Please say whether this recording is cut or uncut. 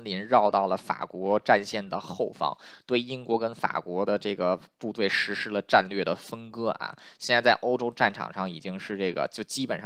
uncut